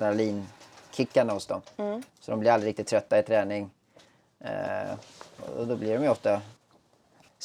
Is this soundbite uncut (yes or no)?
yes